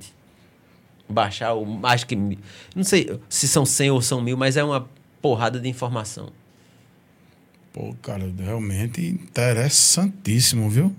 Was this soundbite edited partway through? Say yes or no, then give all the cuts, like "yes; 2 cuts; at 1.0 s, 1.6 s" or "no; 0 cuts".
no; 0 cuts